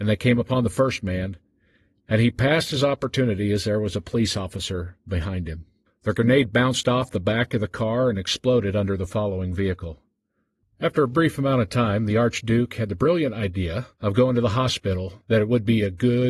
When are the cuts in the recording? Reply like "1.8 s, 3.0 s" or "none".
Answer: 5.9 s, 10.6 s, 13.9 s